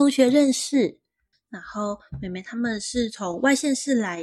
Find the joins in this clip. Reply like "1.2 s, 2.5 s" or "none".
1.3 s

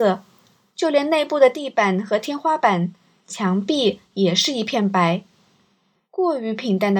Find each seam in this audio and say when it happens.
none

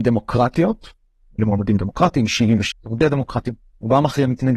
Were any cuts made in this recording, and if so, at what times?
1.4 s, 2.7 s

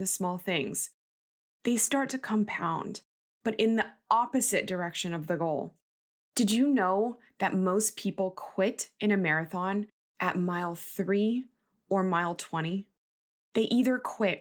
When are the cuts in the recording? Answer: none

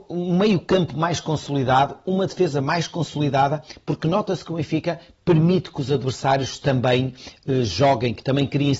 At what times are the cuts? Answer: none

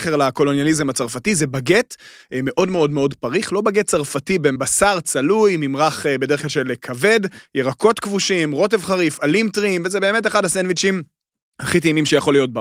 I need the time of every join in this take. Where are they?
4.6 s

